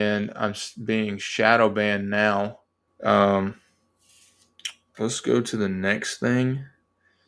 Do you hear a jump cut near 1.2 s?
no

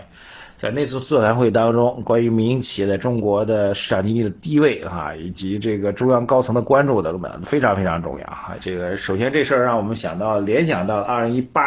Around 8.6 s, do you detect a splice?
yes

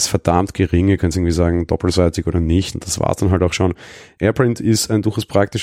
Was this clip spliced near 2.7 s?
yes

